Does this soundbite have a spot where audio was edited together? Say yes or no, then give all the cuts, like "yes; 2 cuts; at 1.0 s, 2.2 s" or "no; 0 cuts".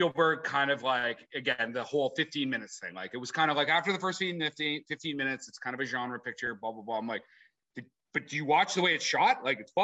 no; 0 cuts